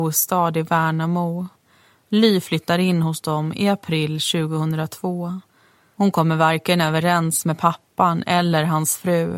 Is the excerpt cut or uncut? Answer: uncut